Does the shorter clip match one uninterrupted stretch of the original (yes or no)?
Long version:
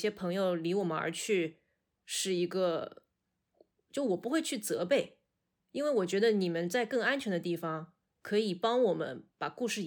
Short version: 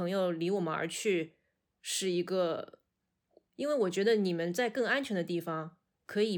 no